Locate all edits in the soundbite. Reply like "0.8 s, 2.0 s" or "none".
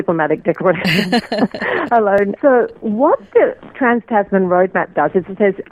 2.4 s